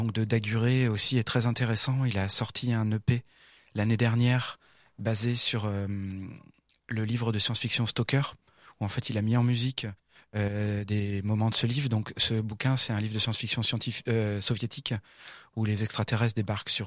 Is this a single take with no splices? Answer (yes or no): yes